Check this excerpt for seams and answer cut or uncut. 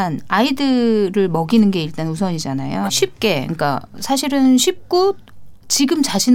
cut